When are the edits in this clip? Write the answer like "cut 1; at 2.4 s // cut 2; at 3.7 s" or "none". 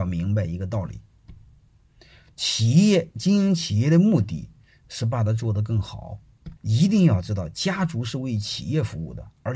cut 1; at 6.6 s